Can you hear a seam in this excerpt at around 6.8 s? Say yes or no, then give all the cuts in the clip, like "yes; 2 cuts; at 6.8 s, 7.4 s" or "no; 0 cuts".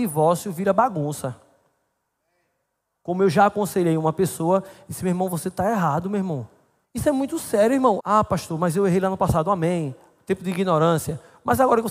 yes; 2 cuts; at 6.8 s, 8.0 s